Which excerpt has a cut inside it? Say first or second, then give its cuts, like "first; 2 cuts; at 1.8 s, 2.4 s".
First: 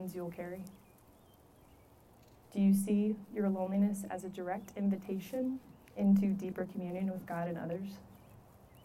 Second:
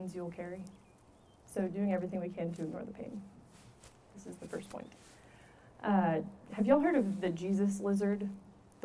second; 1 cut; at 1.4 s